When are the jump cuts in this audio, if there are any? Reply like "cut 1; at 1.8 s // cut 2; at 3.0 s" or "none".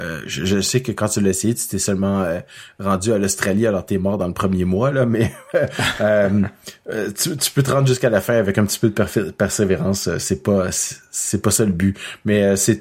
none